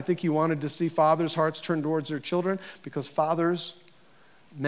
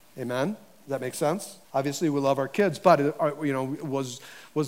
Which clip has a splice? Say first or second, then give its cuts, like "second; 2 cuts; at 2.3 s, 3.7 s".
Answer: second; 1 cut; at 1.6 s